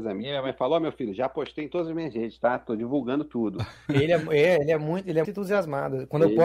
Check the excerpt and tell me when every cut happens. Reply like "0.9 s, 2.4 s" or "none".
3.9 s, 5.2 s